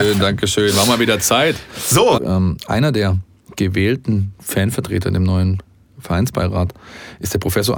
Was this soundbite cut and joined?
yes; 1 cut; at 2.2 s

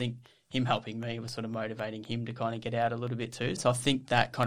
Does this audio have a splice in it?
yes; 1 cut; at 3.6 s

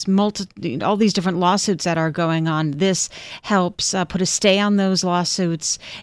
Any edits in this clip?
no; 0 cuts

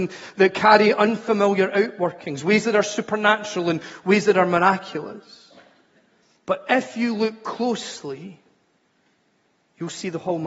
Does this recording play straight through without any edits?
yes; 0 cuts

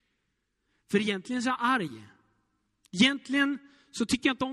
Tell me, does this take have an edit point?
no; 0 cuts

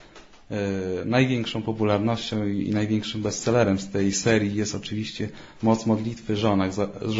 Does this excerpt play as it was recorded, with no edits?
yes; 0 cuts

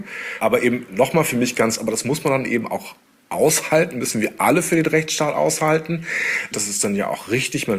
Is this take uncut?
no; 2 cuts; at 1.8 s, 6.5 s

